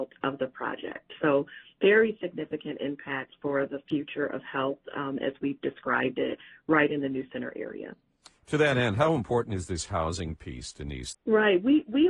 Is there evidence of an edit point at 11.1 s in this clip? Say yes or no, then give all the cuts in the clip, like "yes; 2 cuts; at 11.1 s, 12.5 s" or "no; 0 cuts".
yes; 2 cuts; at 8.3 s, 11.1 s